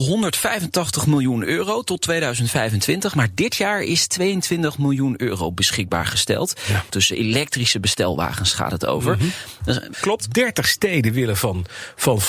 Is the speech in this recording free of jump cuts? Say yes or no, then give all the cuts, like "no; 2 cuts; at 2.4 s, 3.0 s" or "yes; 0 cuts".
no; 2 cuts; at 6.9 s, 9.9 s